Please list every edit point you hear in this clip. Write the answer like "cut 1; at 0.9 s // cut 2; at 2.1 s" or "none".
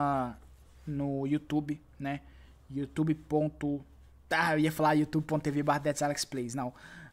none